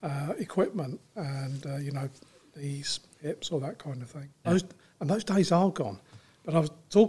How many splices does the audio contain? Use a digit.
1